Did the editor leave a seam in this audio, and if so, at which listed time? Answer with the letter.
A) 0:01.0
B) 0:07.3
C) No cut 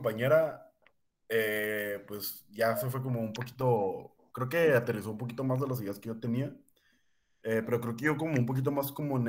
C